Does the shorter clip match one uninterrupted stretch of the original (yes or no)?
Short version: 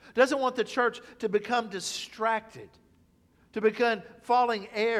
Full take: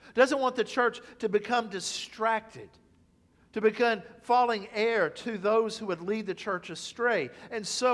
yes